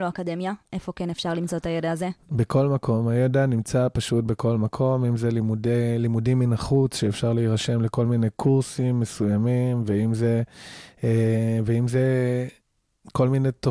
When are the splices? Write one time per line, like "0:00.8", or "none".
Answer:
none